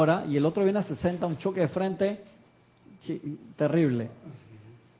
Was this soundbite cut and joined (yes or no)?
no